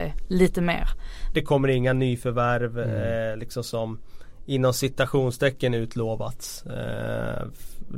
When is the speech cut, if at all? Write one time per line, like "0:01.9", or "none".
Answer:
0:01.3